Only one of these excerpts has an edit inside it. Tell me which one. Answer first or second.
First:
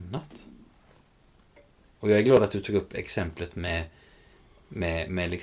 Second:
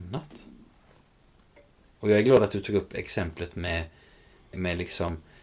second